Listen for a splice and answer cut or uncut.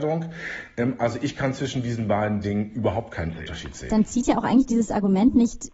uncut